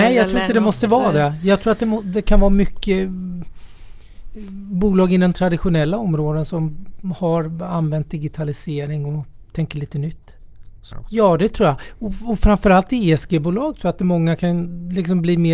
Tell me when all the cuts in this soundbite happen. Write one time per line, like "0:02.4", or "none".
0:10.9